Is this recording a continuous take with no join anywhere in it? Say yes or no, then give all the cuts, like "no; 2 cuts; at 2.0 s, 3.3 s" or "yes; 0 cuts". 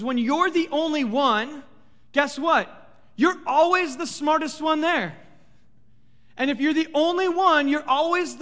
yes; 0 cuts